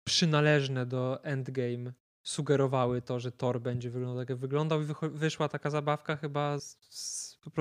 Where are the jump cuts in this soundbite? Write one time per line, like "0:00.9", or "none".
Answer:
0:06.6